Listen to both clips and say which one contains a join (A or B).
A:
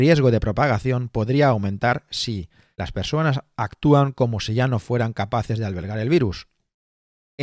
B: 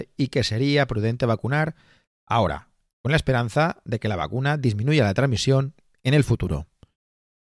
A